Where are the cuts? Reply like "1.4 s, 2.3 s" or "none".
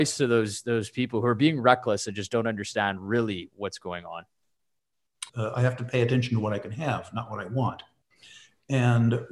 5.3 s